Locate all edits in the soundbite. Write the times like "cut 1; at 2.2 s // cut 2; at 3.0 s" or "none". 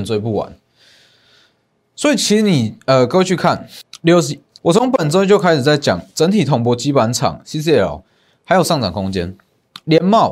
cut 1; at 4.6 s